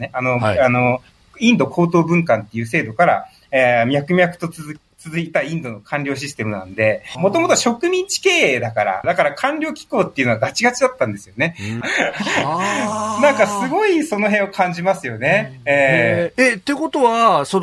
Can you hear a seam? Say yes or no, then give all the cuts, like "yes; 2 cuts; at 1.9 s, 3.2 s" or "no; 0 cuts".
yes; 3 cuts; at 7.1 s, 9.0 s, 11.8 s